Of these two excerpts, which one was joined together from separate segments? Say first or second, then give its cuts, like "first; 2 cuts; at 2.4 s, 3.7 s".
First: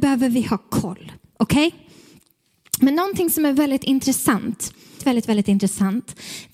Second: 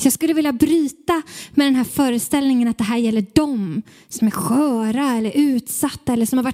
first; 1 cut; at 5.0 s